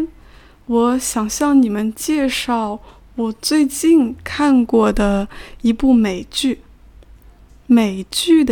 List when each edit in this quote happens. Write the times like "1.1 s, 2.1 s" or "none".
none